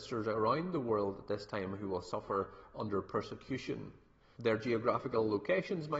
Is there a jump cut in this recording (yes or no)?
yes